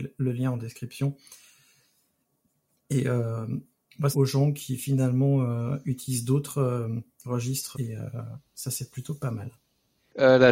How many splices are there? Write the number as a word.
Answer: two